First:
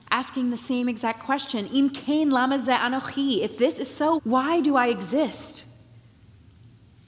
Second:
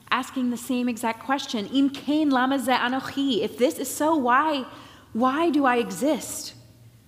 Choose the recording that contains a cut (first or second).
first